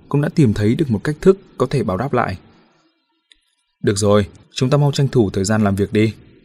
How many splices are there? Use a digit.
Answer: 1